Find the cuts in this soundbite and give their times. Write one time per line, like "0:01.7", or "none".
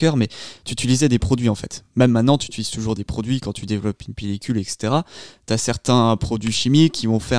none